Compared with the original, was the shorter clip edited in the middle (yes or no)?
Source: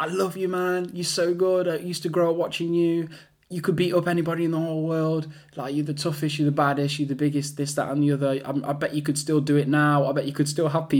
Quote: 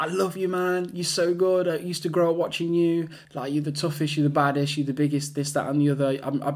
yes